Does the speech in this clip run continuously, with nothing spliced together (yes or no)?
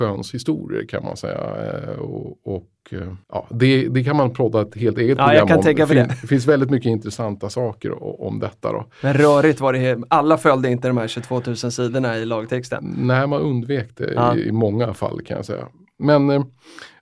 no